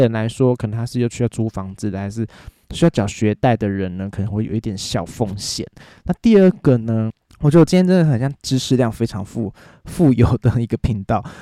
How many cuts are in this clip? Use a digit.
0